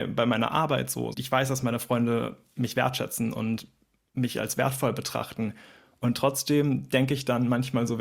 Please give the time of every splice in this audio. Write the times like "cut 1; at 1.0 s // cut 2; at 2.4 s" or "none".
cut 1; at 1.1 s